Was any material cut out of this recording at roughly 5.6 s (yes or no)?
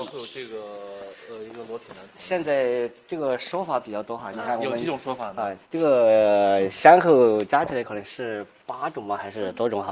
yes